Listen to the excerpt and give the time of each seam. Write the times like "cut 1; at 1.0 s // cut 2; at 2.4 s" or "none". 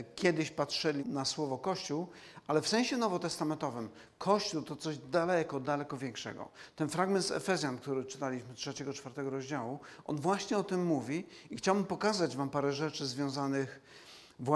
cut 1; at 1.0 s